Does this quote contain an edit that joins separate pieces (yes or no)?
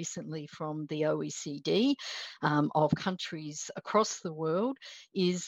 no